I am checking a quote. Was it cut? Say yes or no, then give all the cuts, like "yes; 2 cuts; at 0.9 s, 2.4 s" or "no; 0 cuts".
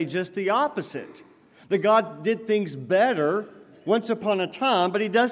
no; 0 cuts